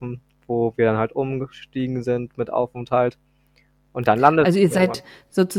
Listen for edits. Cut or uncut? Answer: uncut